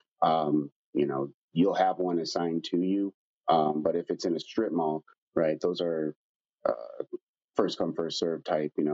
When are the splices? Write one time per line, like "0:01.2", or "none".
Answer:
none